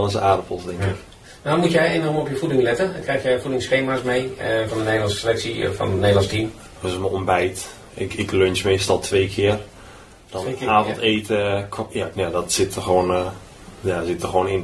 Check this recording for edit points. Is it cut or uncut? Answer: cut